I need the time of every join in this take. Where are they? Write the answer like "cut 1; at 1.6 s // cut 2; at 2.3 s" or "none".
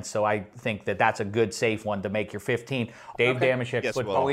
cut 1; at 3.1 s